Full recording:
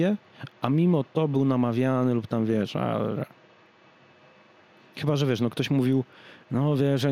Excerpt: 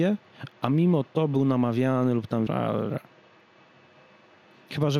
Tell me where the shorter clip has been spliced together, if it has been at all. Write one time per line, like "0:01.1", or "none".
0:02.5